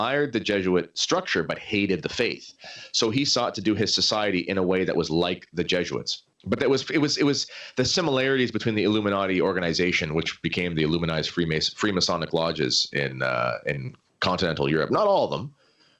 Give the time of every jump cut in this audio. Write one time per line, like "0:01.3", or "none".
0:06.3